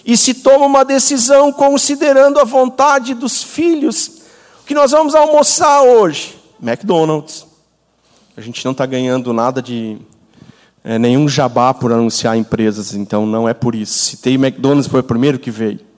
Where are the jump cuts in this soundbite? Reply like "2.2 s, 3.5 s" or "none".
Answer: none